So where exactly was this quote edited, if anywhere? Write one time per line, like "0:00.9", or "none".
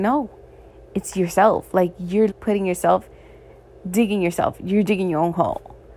0:02.3

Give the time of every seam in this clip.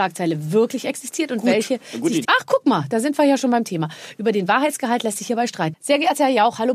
0:02.2
0:05.7

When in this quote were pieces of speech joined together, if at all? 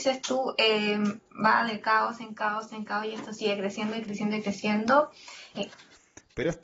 0:05.5

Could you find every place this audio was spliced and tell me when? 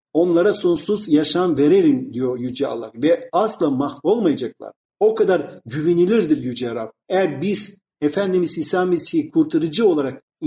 0:07.0

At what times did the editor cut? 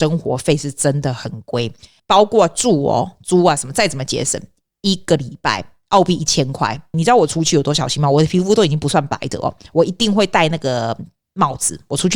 0:02.0
0:06.9

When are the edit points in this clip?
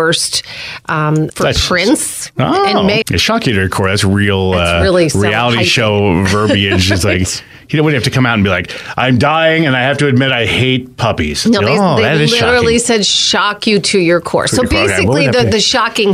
0:01.3
0:03.0

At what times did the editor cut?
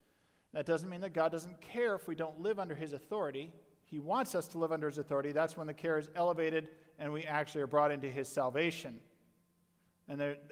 none

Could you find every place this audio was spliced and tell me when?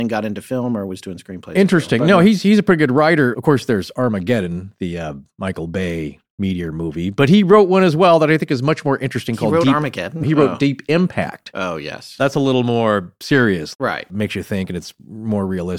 0:10.2
0:13.7

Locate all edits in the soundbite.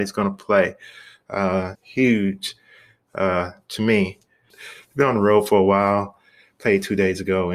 0:01.7
0:04.5

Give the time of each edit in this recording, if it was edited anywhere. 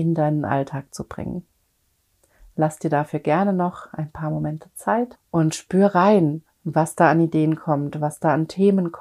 0:05.1

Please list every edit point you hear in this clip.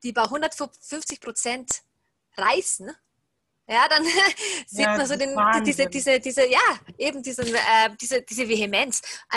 none

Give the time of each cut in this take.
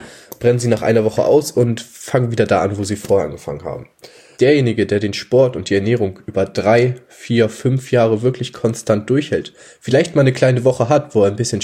0:04.4

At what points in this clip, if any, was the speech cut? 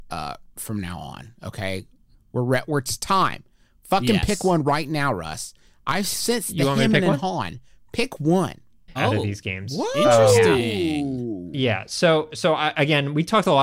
0:09.0

